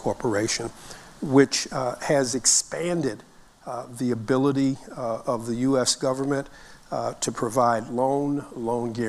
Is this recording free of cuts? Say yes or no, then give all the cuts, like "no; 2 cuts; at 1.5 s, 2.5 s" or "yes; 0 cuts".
yes; 0 cuts